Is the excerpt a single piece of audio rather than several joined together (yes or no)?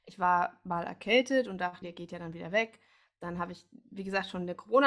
no